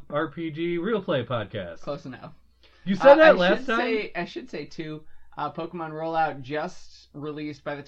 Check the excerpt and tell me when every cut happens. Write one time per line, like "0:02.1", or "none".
none